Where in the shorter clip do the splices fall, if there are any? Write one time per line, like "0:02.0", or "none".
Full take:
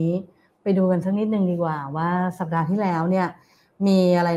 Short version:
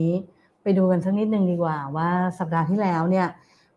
none